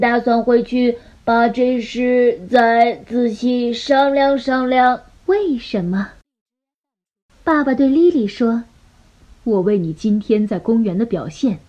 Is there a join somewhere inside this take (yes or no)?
yes